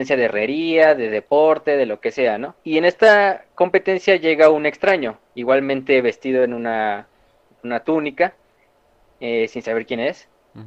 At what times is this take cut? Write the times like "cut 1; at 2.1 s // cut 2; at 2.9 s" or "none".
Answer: cut 1; at 2.6 s

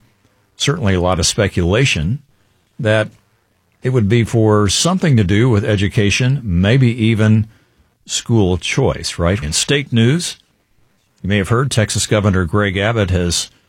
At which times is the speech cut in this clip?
cut 1; at 9.4 s

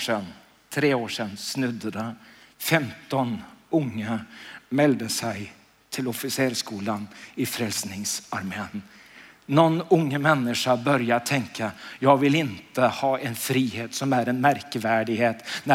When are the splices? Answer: none

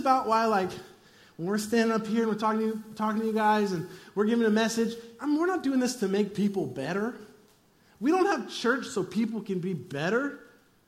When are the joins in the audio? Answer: cut 1; at 5.2 s

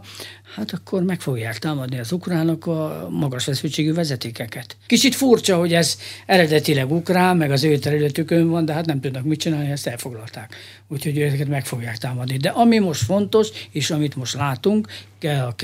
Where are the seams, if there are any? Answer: cut 1; at 4.9 s

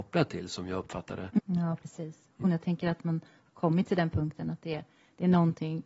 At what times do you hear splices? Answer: cut 1; at 1.4 s // cut 2; at 2.4 s

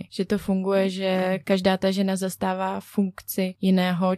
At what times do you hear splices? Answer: cut 1; at 1.4 s

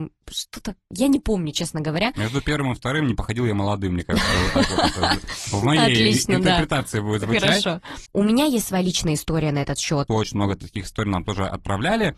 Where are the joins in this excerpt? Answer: cut 1; at 8.1 s // cut 2; at 10.1 s

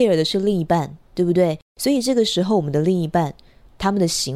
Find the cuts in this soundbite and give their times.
cut 1; at 1.6 s

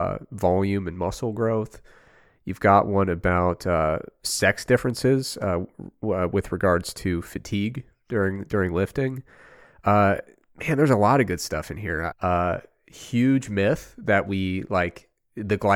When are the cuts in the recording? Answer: cut 1; at 12.1 s

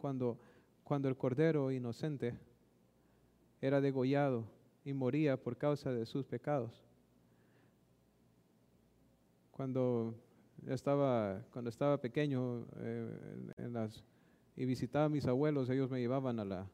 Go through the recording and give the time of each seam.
none

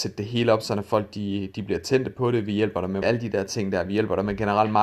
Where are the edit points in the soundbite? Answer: cut 1; at 3.0 s

